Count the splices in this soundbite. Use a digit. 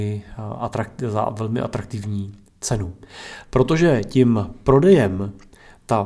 1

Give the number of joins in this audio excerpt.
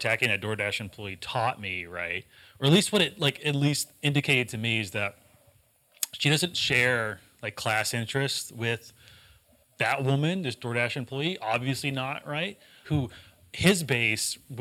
1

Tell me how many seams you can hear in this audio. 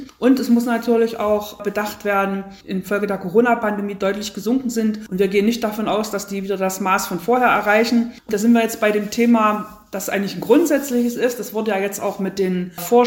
1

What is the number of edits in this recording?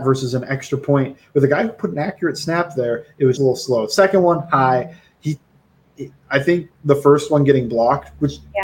1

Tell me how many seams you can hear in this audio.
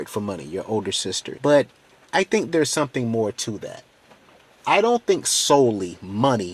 1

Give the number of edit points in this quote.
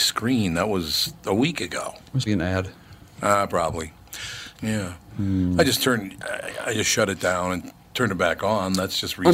2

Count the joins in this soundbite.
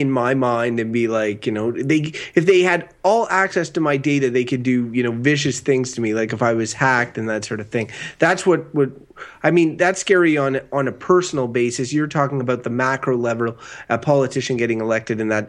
0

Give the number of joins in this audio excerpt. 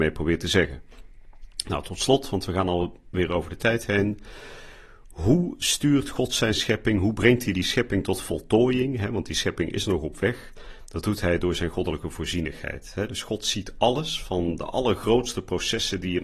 0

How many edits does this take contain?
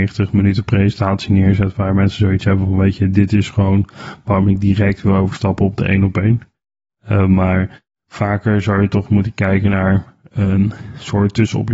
0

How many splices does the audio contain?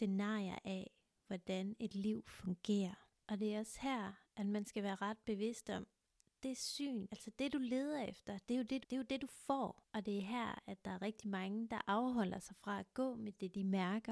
3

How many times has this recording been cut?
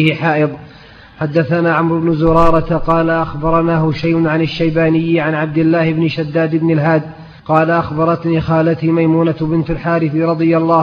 1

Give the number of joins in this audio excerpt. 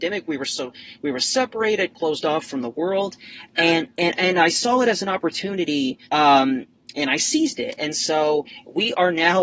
1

